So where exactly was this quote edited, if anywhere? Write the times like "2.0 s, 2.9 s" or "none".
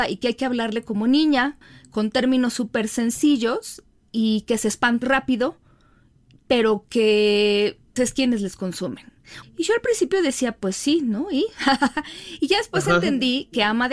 5.0 s, 8.0 s, 9.4 s